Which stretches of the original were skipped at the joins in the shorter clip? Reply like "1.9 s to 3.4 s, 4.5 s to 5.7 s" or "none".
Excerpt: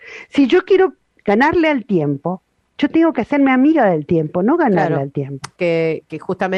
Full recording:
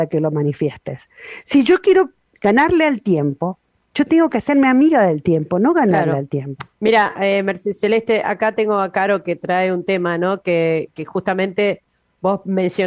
6.7 s to 10.4 s